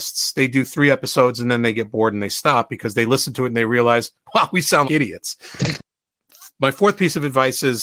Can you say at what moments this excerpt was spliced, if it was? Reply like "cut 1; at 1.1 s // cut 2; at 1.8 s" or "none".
cut 1; at 4.8 s